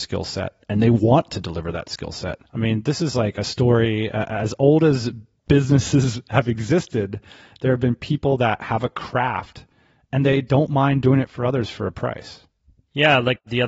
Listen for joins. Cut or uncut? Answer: cut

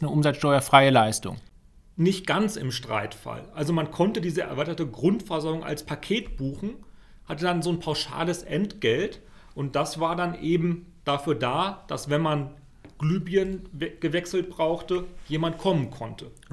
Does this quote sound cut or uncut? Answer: uncut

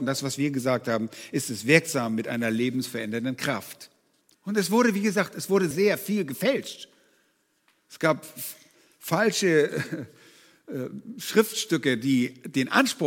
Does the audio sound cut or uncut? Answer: cut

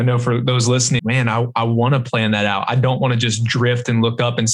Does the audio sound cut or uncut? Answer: cut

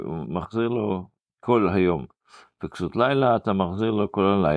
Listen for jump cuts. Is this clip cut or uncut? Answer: uncut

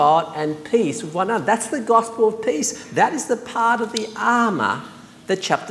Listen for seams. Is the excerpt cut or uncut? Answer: uncut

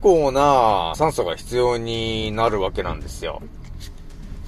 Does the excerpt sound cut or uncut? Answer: cut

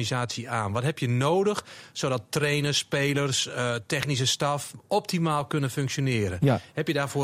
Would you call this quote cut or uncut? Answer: uncut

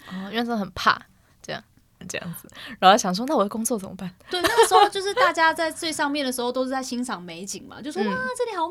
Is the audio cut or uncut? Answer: cut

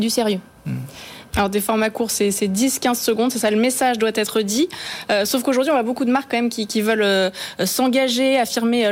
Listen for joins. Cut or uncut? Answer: cut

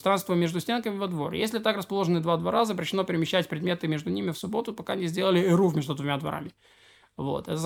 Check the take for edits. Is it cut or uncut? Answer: uncut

